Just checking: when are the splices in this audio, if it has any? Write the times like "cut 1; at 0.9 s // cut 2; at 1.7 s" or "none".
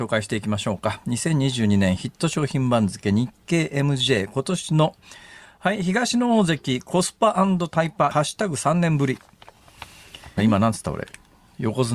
cut 1; at 8.1 s // cut 2; at 10.4 s